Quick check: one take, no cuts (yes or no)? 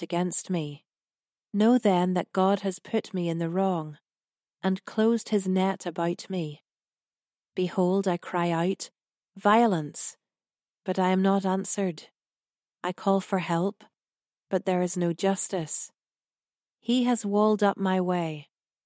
yes